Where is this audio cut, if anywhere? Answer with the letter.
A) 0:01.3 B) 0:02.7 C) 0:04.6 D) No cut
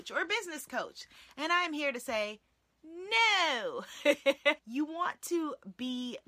C